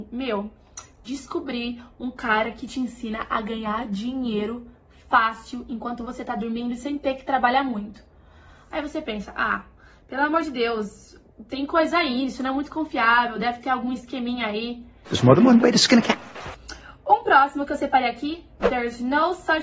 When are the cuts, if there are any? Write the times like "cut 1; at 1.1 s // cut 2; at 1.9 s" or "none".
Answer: cut 1; at 15.0 s